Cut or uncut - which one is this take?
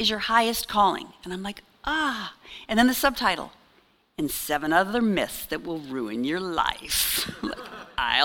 uncut